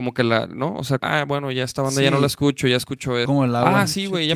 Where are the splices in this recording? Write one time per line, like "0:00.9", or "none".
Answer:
0:01.0
0:03.3